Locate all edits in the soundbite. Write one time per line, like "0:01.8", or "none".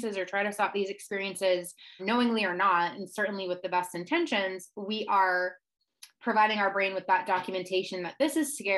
0:02.0
0:06.1